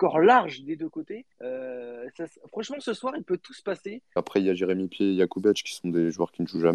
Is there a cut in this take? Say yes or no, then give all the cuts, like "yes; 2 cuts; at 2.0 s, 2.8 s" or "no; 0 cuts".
yes; 2 cuts; at 1.3 s, 4.2 s